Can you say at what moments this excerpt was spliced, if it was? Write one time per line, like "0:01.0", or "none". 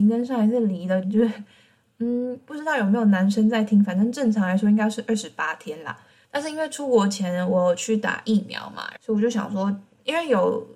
0:01.0
0:06.2
0:09.0